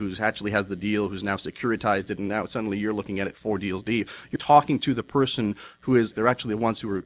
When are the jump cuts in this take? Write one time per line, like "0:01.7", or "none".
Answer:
0:04.4
0:06.1